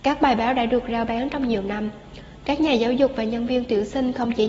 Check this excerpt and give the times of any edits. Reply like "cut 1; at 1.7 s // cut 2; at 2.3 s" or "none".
none